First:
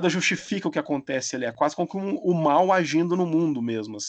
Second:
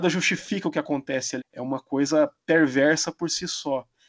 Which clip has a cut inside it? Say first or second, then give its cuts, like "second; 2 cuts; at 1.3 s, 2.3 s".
second; 1 cut; at 1.4 s